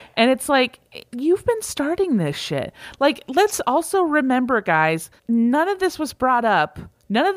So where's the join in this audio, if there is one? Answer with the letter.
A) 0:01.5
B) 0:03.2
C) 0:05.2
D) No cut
C